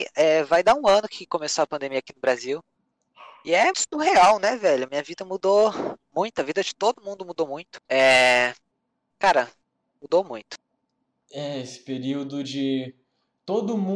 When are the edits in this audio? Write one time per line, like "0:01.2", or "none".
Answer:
0:03.7
0:07.9